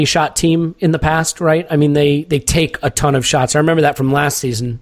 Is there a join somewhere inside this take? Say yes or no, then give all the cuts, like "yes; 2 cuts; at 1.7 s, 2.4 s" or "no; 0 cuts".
no; 0 cuts